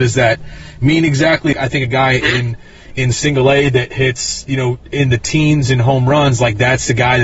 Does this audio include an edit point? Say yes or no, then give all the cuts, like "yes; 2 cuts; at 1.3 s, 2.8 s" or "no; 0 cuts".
yes; 1 cut; at 1.5 s